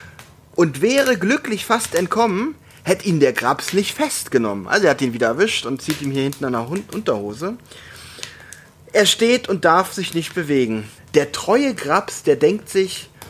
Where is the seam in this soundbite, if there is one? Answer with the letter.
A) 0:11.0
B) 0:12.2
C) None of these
A